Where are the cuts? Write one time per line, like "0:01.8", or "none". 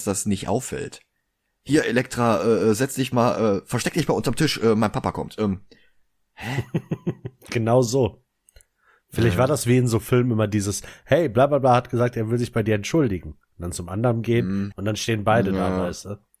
0:14.7

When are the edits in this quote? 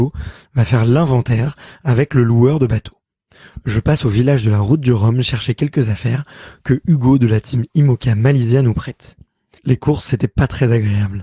0:03.6
0:09.6

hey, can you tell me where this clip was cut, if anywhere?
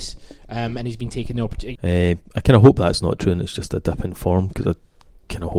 0:01.8

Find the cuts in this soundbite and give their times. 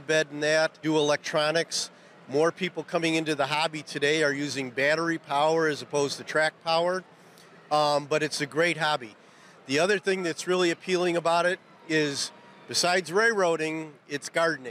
none

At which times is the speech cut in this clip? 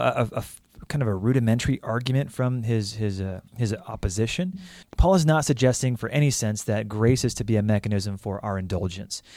0:03.5
0:04.8

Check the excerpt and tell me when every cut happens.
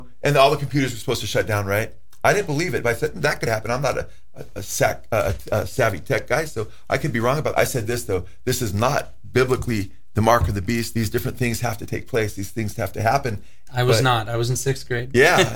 0:07.5
0:10.9
0:13.7

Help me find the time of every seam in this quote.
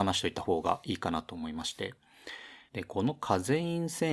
0:02.7

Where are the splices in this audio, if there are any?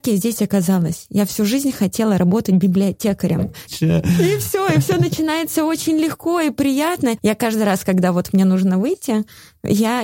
0:03.7
0:07.2

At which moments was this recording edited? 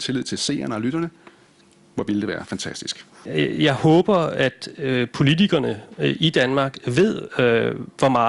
none

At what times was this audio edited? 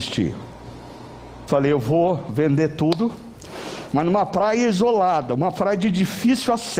0:01.5
0:03.9

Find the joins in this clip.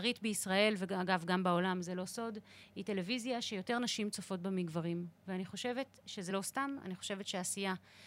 0:06.3

